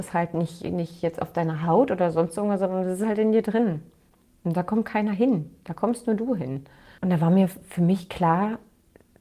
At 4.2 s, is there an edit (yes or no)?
no